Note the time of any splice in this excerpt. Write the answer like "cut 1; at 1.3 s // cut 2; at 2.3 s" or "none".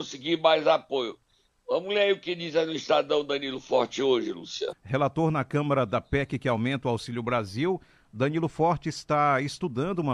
cut 1; at 4.7 s